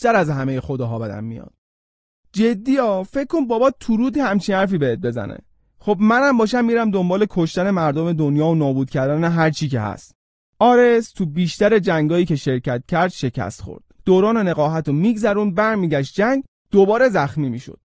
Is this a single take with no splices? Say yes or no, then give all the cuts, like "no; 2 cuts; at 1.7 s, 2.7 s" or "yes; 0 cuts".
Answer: no; 1 cut; at 14.0 s